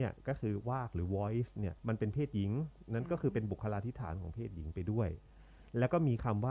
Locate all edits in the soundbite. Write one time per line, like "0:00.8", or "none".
0:01.8